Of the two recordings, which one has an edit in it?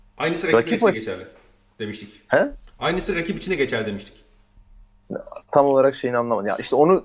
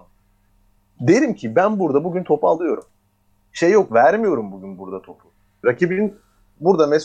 second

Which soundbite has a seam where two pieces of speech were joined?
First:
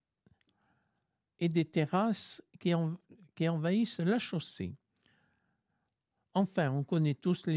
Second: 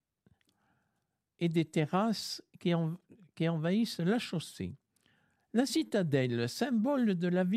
second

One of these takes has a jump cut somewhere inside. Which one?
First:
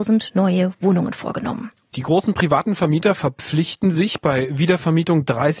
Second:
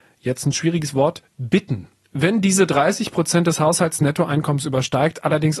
first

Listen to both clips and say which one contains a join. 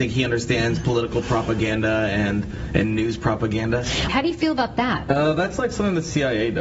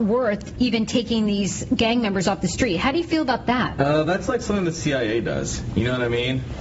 first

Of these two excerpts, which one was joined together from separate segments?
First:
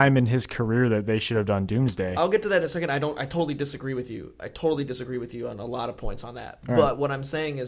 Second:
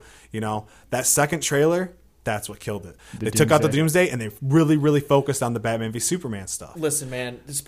second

